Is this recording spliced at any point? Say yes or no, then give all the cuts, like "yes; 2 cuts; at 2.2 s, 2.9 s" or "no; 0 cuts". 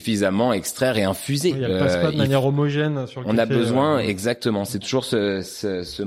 no; 0 cuts